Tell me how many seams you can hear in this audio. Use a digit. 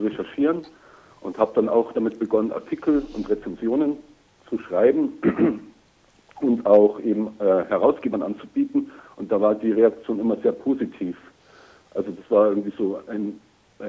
0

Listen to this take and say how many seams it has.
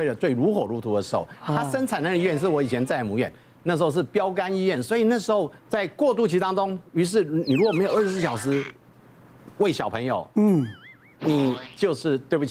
1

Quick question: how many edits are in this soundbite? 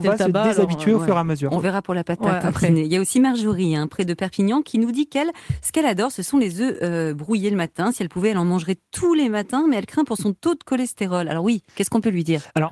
0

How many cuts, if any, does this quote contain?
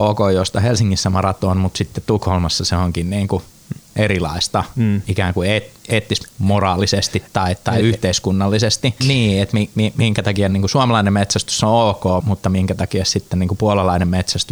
2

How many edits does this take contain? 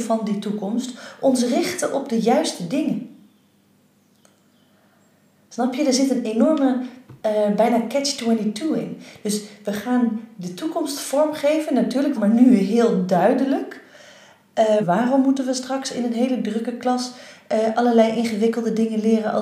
2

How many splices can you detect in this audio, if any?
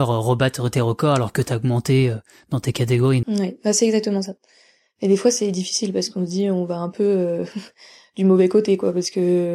1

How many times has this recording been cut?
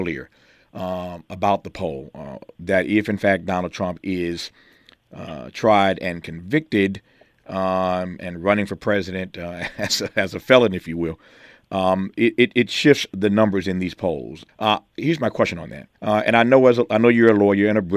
2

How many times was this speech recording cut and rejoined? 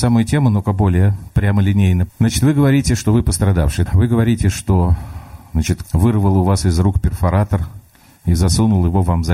3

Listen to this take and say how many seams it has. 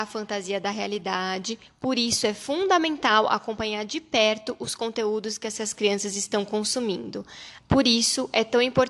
1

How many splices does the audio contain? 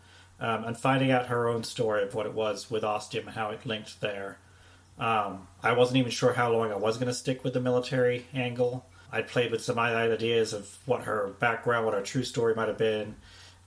1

